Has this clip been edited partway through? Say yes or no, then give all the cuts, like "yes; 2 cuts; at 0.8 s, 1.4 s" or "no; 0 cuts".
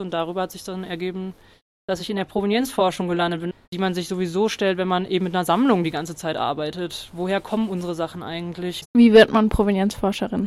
yes; 2 cuts; at 3.6 s, 8.8 s